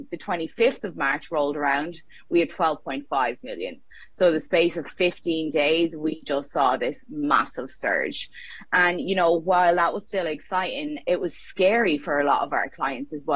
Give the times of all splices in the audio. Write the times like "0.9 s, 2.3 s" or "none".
11.0 s